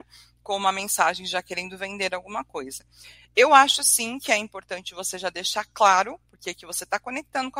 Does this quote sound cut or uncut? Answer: uncut